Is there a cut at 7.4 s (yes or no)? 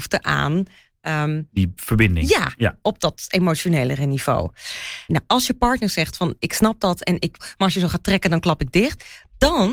yes